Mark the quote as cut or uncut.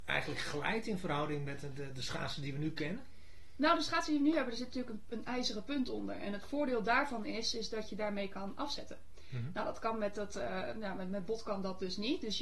uncut